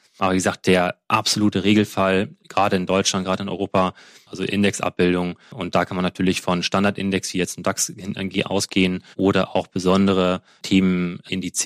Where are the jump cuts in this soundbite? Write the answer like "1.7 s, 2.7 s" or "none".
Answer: 4.3 s